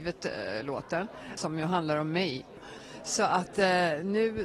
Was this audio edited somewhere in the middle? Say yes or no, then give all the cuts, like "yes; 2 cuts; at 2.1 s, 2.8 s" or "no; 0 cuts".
no; 0 cuts